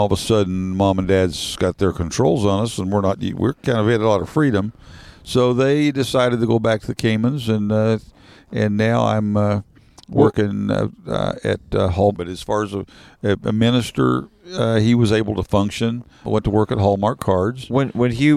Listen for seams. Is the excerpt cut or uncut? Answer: cut